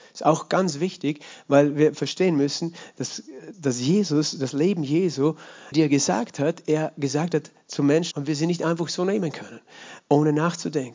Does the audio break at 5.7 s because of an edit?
yes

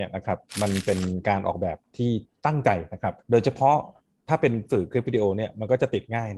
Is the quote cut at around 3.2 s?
yes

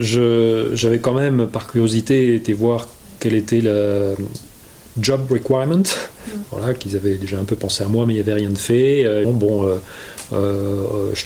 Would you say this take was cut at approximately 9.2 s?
yes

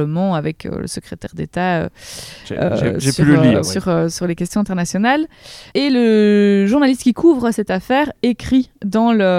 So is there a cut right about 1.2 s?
no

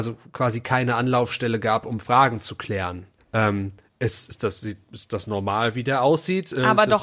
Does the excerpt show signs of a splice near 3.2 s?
yes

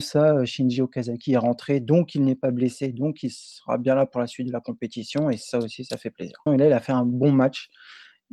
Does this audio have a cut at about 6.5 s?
yes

